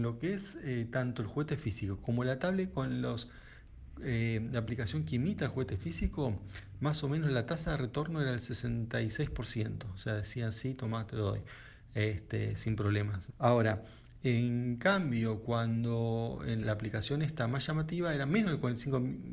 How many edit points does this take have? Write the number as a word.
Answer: two